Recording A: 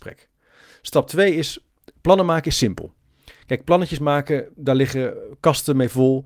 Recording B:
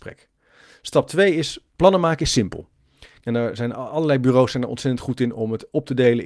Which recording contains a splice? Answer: B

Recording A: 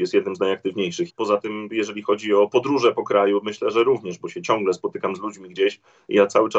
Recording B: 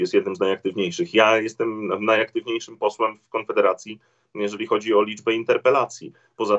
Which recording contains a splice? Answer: A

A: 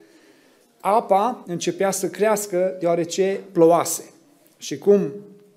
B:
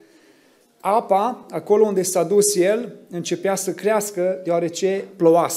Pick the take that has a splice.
A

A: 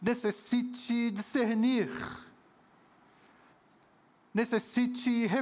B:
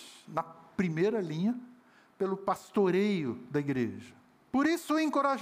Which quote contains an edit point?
B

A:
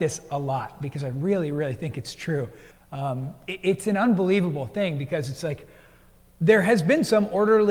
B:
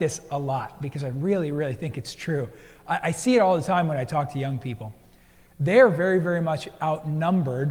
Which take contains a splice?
A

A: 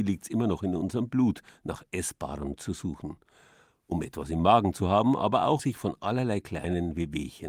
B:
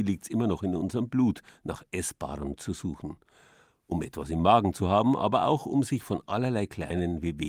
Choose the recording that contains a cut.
A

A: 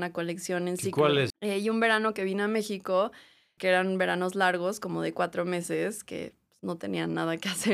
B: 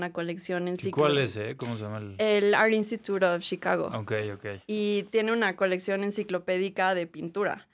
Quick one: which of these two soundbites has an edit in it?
A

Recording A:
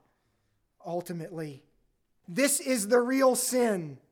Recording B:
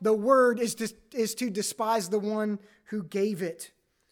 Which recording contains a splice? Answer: A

